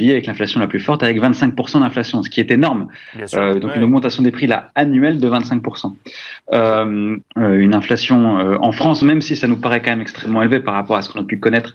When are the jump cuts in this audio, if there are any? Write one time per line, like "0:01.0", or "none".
0:07.2
0:09.0